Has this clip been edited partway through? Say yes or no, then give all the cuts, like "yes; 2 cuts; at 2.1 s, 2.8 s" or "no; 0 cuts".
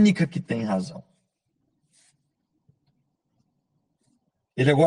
no; 0 cuts